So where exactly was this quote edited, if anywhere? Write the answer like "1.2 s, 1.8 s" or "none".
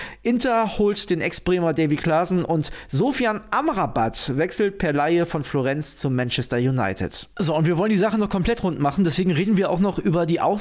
7.3 s

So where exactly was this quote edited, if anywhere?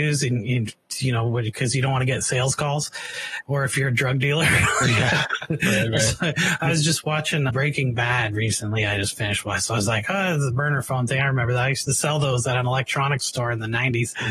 3.4 s

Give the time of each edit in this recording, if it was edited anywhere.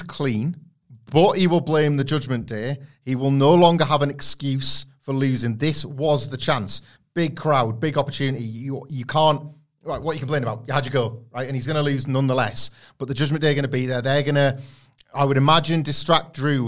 none

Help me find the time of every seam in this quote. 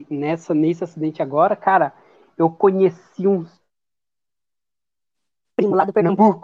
none

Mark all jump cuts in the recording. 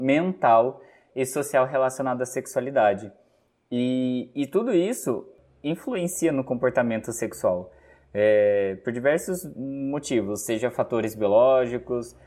none

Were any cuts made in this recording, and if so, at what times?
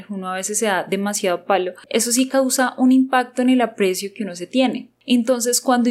1.9 s

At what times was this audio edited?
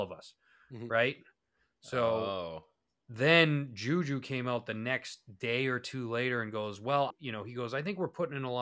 7.1 s

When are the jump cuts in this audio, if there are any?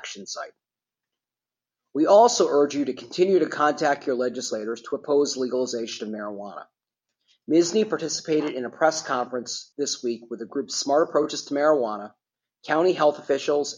none

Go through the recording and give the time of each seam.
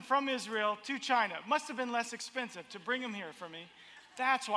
none

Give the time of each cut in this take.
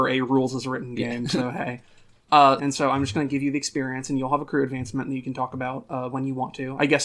2.6 s

